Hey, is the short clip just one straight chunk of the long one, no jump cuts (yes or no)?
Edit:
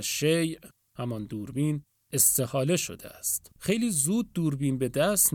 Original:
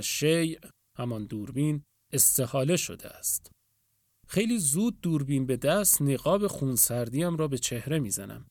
no